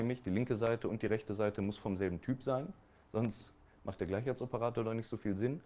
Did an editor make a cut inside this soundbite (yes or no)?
no